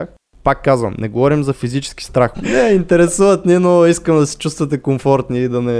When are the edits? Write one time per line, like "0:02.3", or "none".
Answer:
0:02.3